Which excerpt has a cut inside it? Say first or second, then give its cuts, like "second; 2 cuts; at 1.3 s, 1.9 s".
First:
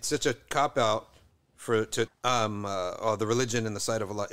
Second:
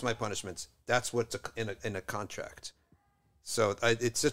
first; 1 cut; at 2.1 s